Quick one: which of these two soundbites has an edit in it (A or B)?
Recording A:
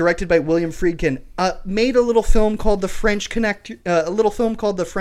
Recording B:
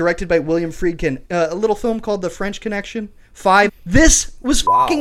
B